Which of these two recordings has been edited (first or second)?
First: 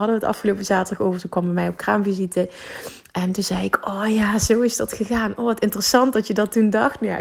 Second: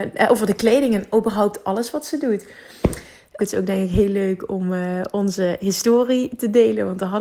second